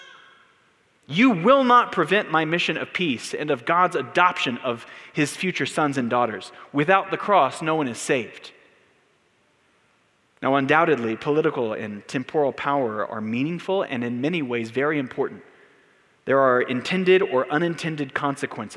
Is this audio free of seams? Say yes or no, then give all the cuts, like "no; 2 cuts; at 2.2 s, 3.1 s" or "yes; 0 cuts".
yes; 0 cuts